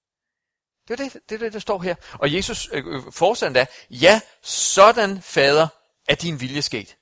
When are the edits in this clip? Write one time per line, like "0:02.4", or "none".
none

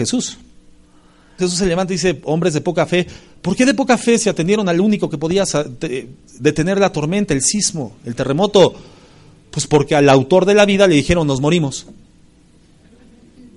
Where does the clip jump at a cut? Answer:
0:01.4

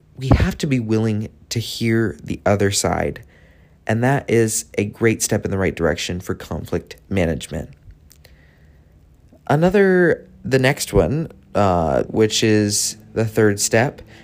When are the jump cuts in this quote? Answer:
0:12.1

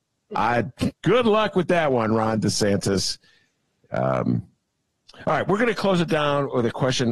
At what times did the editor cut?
none

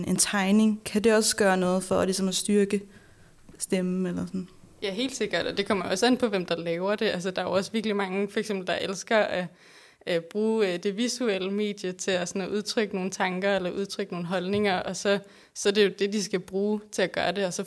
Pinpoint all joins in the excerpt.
none

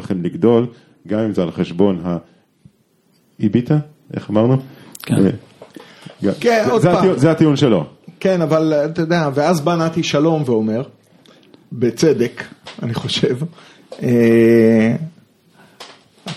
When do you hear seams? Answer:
none

